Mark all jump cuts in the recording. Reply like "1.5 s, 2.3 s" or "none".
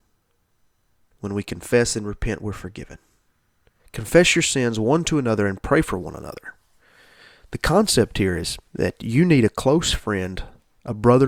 3.8 s, 8.7 s